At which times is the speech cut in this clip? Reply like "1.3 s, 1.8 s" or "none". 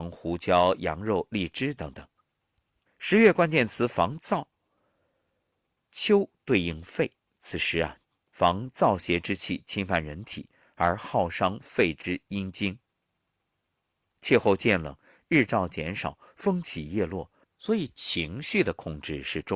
2.9 s, 17.4 s